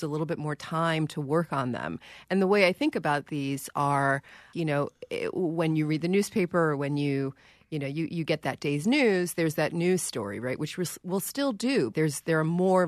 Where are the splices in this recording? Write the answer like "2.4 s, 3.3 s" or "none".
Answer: 4.5 s, 11.9 s